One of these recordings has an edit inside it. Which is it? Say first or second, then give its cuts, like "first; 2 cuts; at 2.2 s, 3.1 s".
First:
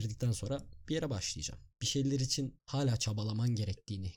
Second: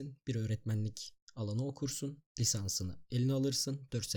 first; 1 cut; at 1.7 s